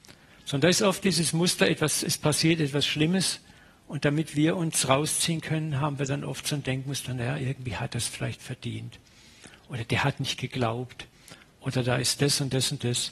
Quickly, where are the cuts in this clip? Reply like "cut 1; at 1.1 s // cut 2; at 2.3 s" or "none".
none